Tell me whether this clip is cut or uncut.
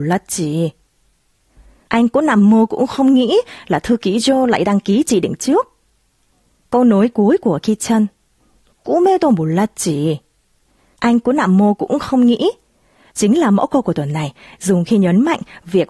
uncut